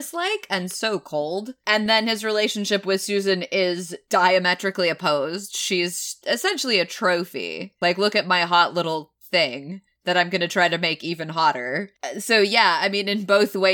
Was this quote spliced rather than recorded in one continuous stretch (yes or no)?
no